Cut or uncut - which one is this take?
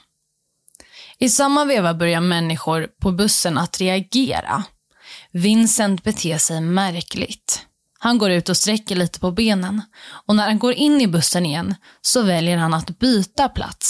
cut